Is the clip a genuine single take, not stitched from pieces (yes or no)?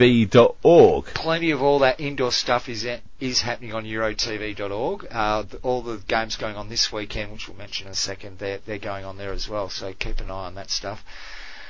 yes